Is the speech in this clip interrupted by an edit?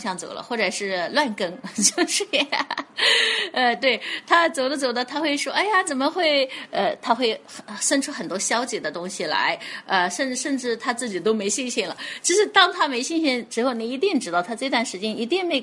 no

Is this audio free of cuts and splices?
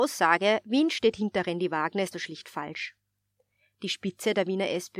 no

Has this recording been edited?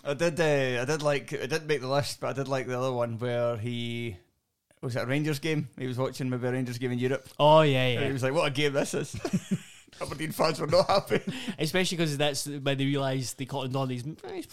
no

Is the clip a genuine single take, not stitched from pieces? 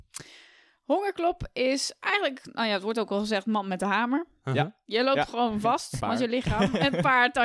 no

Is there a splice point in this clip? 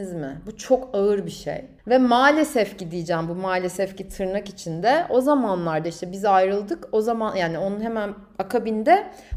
yes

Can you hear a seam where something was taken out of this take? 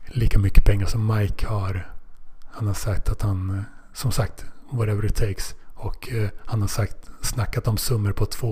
no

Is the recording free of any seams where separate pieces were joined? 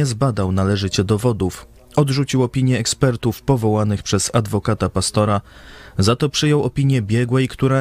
yes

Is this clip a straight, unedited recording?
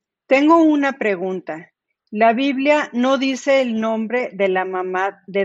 yes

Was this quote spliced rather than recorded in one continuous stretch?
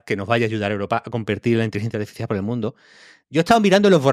no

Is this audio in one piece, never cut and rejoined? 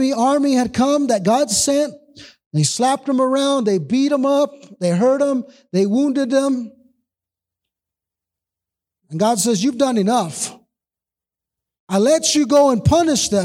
yes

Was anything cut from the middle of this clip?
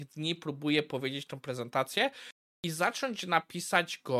yes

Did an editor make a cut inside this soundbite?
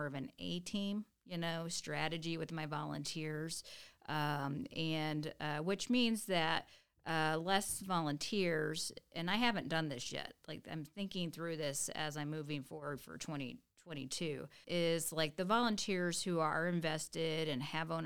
yes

